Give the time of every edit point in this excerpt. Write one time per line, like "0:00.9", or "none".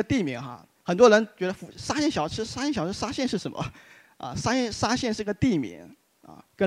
none

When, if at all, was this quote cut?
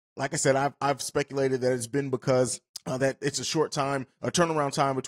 none

